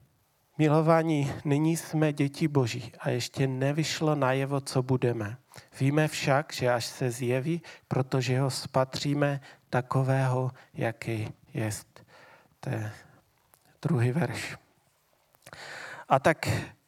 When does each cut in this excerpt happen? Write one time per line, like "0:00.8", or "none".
0:07.8